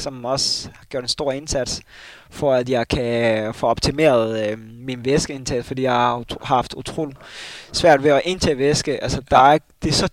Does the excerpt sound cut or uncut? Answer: uncut